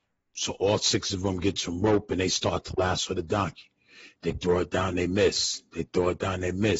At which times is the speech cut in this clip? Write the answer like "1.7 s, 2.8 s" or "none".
none